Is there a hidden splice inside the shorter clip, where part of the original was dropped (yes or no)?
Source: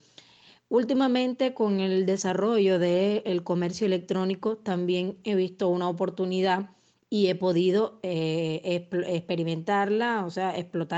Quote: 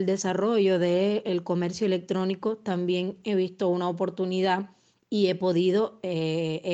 no